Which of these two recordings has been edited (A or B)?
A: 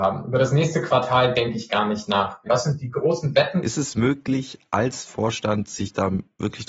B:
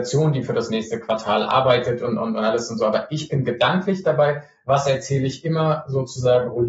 A